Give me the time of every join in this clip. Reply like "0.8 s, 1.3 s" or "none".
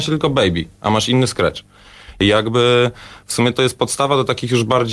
none